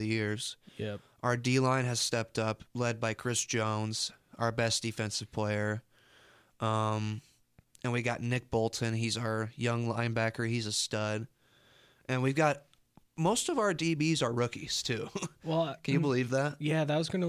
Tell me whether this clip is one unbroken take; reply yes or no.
yes